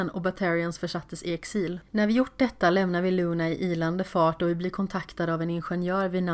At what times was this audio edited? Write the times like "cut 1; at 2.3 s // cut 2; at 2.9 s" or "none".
cut 1; at 1.9 s